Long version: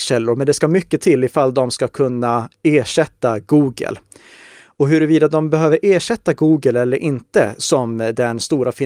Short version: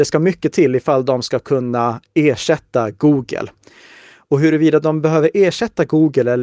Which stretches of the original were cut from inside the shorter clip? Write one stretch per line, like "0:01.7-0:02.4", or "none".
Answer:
none